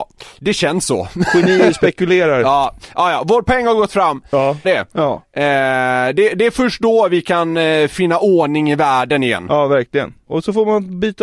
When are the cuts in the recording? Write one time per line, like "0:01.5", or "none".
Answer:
0:04.6